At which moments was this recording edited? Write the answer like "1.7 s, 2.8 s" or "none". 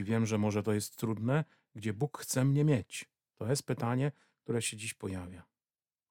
none